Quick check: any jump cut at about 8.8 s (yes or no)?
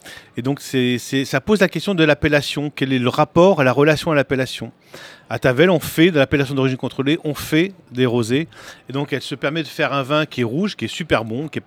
no